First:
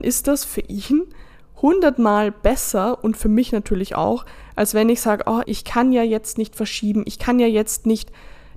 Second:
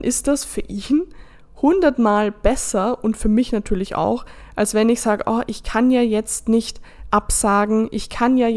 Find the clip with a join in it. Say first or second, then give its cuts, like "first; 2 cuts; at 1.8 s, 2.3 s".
first; 1 cut; at 5.4 s